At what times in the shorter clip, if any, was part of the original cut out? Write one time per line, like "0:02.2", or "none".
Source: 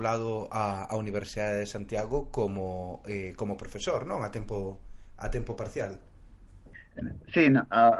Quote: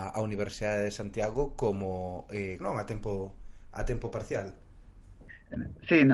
0:02.6